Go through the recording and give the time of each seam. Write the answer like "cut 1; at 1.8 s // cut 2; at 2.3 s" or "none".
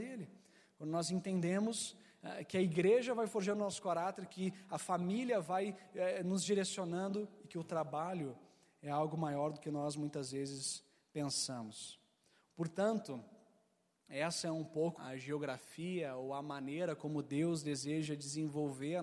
cut 1; at 12.5 s // cut 2; at 15.0 s